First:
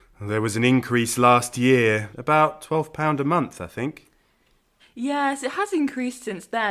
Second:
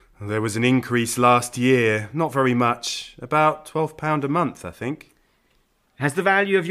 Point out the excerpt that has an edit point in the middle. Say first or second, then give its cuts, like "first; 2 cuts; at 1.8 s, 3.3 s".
first; 2 cuts; at 2.1 s, 4.8 s